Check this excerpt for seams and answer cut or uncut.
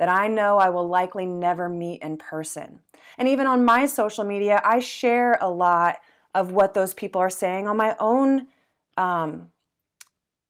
cut